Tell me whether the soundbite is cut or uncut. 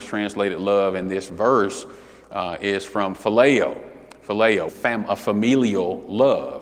cut